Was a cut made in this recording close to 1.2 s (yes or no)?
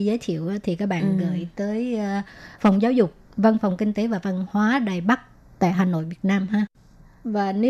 no